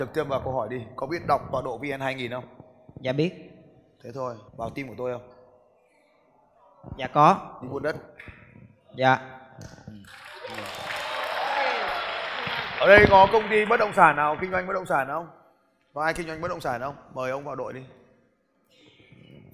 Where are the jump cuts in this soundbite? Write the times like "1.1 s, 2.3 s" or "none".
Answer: 4.5 s